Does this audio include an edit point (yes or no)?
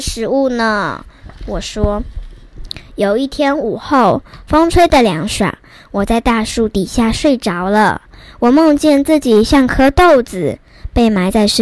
no